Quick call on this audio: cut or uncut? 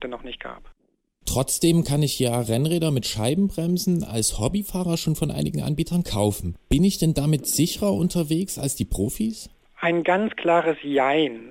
uncut